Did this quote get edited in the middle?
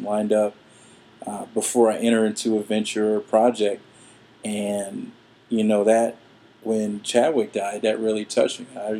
no; 0 cuts

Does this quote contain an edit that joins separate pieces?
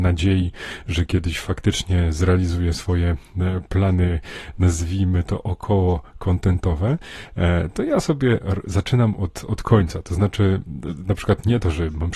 no; 0 cuts

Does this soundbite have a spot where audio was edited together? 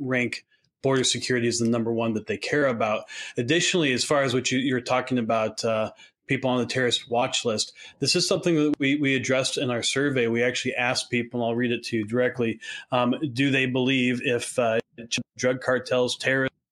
no; 0 cuts

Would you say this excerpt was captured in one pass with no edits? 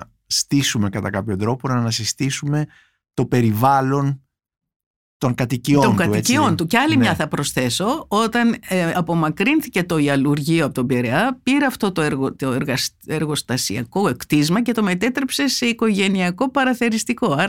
yes; 0 cuts

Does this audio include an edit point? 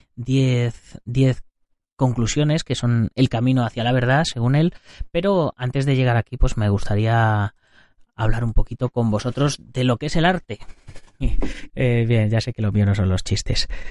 yes; 1 cut; at 11.7 s

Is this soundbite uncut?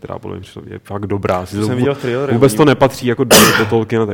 yes; 0 cuts

